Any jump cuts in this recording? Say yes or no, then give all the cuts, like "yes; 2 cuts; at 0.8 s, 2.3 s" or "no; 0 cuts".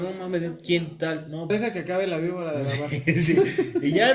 yes; 1 cut; at 1.5 s